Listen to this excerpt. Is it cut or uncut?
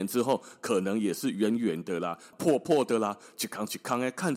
cut